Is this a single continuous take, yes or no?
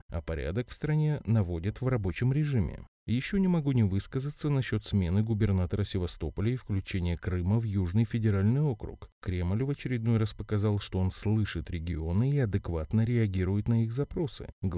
yes